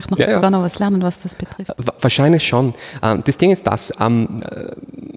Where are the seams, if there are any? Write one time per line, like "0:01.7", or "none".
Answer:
none